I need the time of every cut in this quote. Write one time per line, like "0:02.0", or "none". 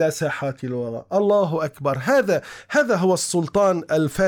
none